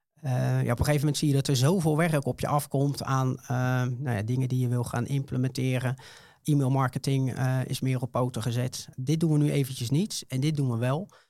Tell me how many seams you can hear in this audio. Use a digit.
1